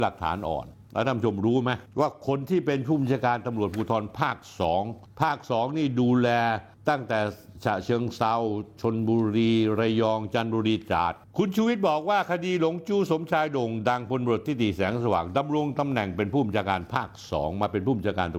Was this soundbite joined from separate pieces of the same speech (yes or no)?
yes